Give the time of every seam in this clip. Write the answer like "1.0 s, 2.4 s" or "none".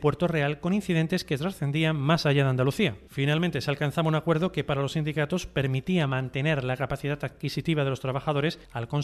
none